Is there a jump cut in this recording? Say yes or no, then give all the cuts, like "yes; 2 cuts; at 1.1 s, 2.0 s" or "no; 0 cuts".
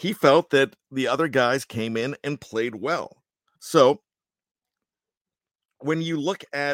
yes; 1 cut; at 3.6 s